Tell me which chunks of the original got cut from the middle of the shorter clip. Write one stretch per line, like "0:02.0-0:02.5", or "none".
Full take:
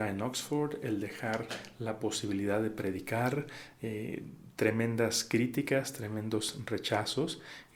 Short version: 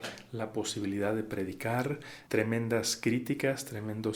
0:03.7-0:04.5